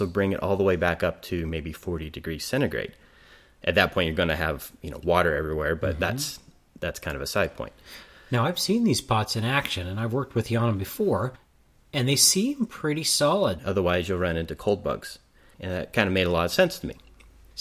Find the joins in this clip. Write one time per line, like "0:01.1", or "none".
0:13.6
0:15.5